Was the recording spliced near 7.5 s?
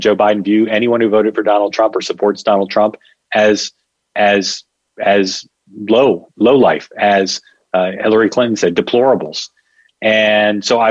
no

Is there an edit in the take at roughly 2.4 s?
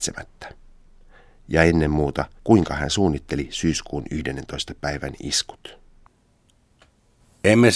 yes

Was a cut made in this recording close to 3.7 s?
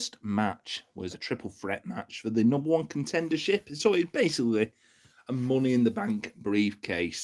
no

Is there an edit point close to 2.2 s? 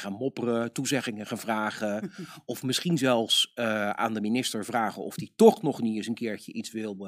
no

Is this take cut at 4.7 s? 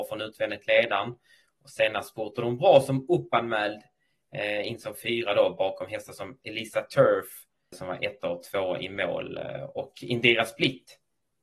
no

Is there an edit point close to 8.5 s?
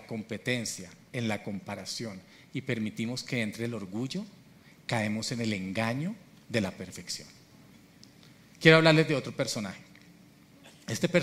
no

